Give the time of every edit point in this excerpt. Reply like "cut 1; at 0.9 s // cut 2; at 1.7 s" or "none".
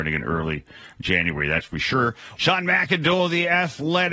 cut 1; at 2.4 s